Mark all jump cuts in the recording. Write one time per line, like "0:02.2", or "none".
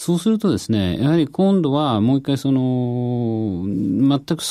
none